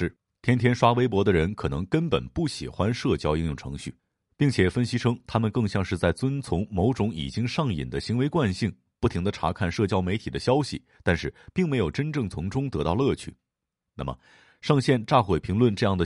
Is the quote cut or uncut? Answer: uncut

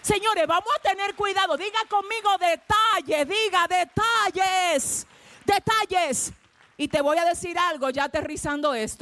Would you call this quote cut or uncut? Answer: uncut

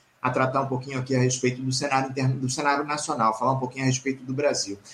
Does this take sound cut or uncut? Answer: uncut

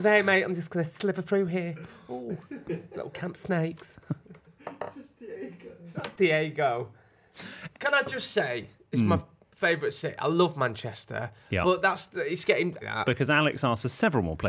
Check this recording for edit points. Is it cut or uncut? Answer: cut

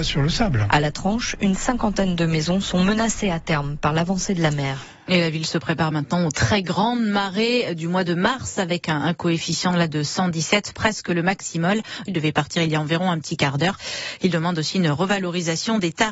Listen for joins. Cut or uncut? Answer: cut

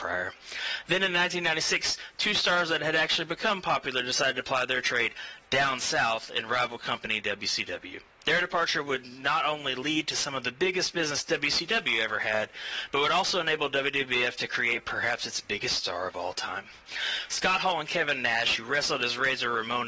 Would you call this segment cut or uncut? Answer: uncut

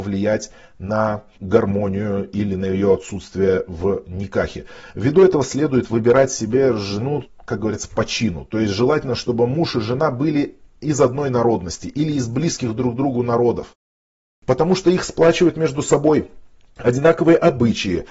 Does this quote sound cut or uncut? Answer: uncut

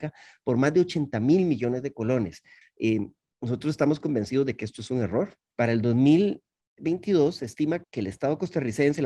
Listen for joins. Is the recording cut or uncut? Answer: cut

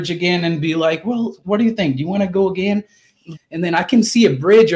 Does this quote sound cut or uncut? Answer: cut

